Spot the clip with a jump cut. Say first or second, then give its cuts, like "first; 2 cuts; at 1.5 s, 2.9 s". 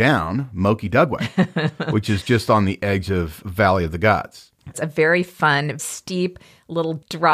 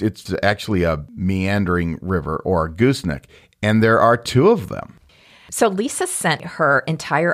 first; 2 cuts; at 4.7 s, 5.8 s